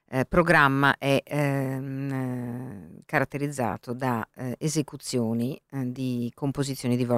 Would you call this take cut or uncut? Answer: uncut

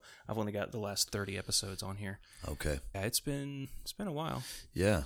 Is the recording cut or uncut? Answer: cut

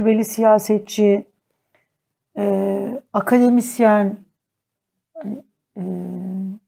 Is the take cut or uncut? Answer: uncut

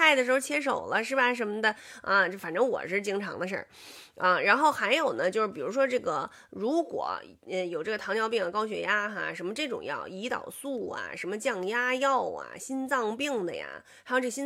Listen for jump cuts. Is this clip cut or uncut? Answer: uncut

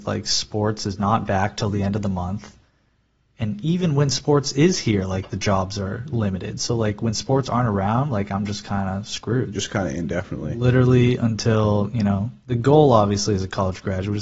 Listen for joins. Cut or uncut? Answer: cut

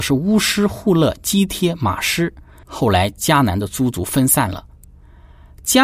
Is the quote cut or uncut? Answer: cut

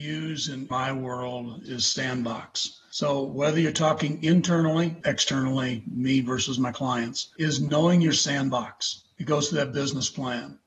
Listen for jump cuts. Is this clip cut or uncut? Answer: cut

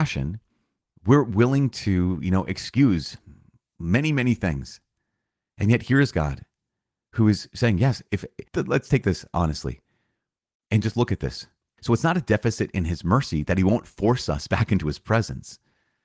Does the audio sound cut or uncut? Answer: cut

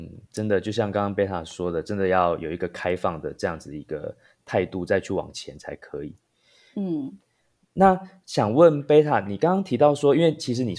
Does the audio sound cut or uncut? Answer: uncut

